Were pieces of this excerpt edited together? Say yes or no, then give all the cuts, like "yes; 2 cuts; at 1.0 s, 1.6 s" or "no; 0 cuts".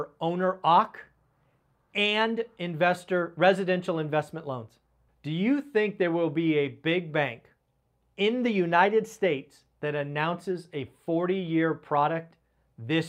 yes; 1 cut; at 5.1 s